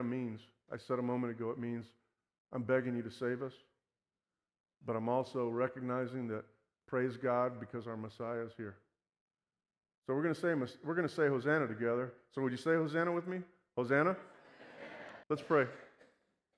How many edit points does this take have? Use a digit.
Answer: 1